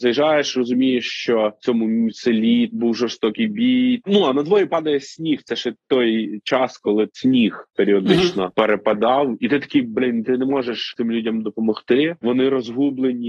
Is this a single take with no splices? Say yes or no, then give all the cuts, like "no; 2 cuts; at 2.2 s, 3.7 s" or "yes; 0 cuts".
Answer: no; 1 cut; at 4.0 s